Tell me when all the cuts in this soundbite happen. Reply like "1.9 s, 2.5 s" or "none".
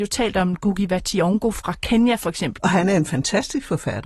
2.6 s